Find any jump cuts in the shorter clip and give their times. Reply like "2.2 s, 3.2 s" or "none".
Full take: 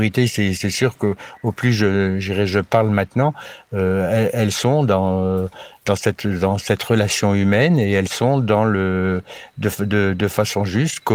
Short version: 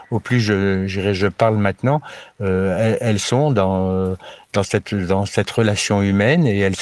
none